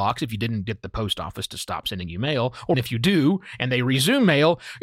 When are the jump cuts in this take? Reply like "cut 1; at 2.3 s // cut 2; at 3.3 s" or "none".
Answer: cut 1; at 2.7 s